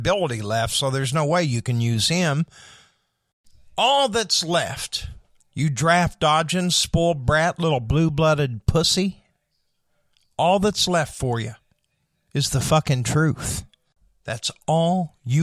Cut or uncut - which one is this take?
cut